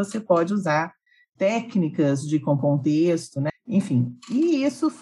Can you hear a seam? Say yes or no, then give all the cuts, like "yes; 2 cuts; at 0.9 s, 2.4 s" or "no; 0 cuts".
yes; 1 cut; at 3.5 s